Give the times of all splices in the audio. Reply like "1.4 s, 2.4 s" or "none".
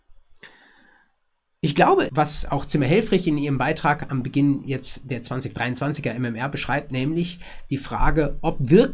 2.1 s